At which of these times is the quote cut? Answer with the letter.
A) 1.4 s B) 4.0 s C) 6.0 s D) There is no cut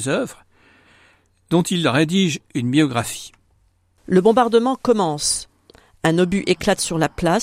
B